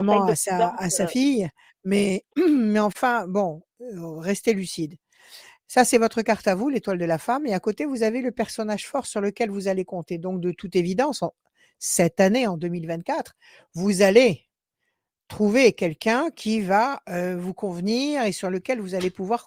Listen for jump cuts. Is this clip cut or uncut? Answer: uncut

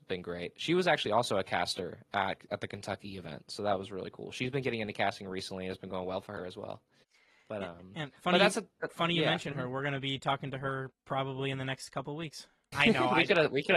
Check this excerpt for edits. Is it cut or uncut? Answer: cut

